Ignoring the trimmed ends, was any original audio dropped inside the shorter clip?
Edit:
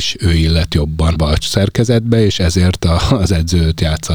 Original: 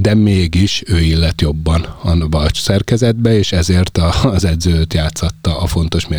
yes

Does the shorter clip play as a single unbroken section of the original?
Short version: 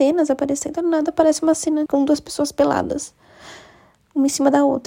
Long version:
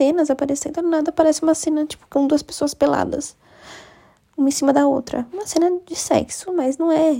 no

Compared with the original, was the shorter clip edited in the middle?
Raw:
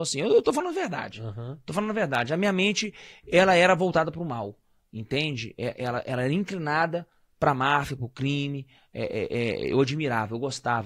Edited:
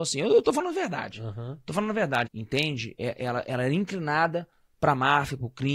yes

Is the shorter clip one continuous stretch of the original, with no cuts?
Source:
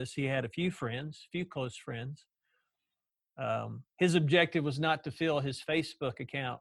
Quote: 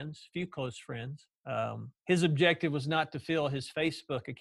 no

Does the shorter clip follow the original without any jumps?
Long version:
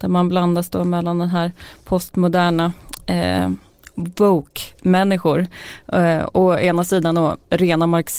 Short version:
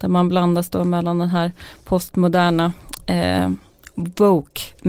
yes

